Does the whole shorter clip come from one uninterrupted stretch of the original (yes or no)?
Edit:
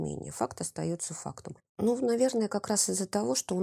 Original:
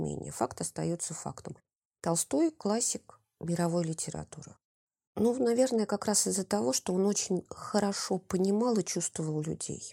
no